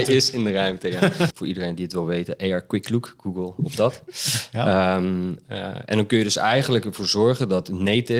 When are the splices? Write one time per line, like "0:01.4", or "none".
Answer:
0:01.3